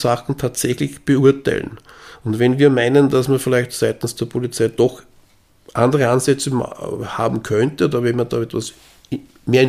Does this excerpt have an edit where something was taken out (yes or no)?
no